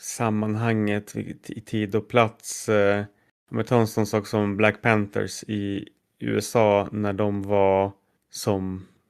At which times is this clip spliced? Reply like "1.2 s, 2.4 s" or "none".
none